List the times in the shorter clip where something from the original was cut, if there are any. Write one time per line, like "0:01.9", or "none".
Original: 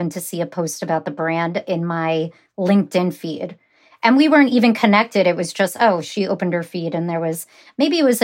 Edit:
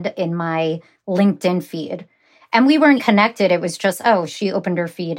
0:03.0